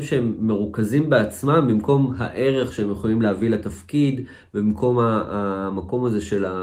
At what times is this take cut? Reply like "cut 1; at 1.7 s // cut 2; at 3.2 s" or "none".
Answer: none